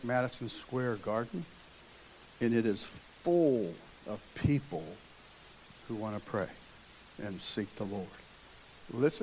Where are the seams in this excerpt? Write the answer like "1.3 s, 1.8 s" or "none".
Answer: none